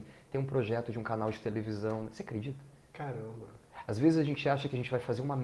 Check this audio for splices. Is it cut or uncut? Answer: uncut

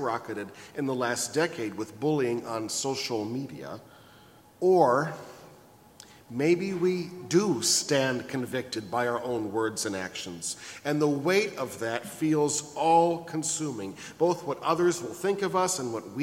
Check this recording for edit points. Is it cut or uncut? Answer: cut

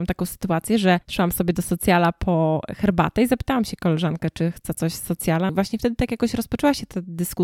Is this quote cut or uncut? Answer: cut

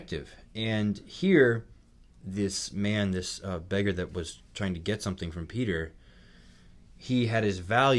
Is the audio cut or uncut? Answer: uncut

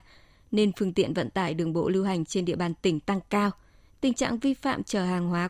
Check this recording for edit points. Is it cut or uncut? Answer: uncut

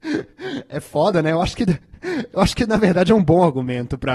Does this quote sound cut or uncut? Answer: uncut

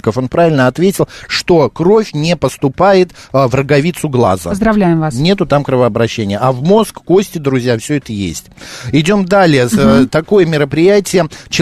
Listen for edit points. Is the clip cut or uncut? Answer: uncut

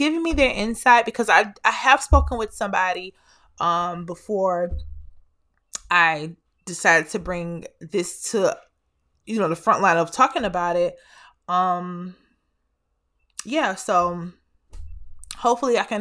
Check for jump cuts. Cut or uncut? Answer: uncut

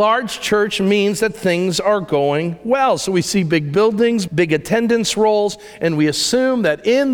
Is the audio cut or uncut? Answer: cut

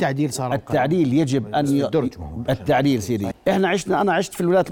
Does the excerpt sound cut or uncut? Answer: cut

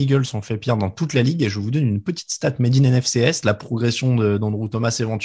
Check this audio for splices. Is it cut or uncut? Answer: cut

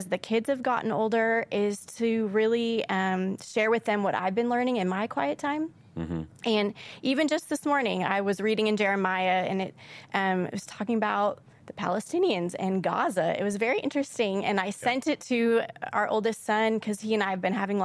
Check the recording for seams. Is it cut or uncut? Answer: uncut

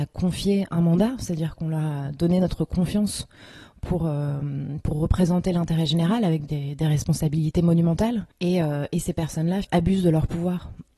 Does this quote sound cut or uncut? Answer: cut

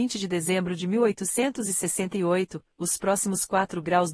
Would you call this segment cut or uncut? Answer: uncut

